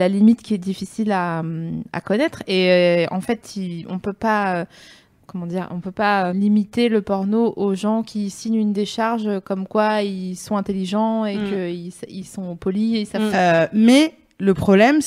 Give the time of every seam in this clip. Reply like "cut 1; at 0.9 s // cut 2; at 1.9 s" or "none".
cut 1; at 6.3 s // cut 2; at 13.3 s